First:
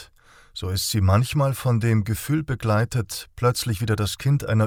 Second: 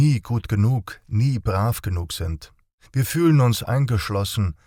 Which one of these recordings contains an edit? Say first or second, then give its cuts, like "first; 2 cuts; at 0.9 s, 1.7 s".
second; 1 cut; at 2.9 s